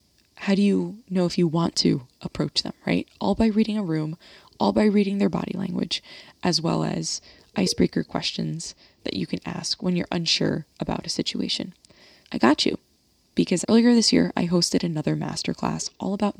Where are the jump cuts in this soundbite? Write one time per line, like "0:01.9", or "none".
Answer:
0:12.2
0:13.6